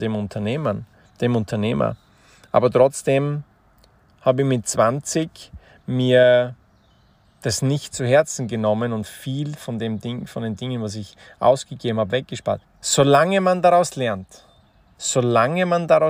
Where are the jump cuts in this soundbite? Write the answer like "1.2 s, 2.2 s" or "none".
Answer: 12.6 s, 15.0 s